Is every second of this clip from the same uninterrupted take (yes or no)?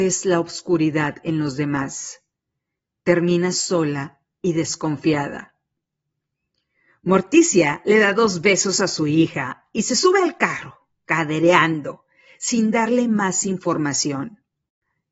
yes